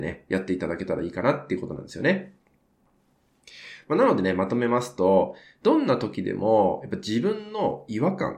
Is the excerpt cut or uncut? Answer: uncut